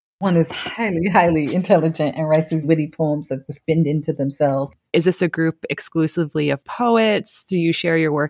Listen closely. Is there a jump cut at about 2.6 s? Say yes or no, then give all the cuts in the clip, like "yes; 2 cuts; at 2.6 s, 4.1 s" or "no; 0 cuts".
yes; 2 cuts; at 2.6 s, 4.9 s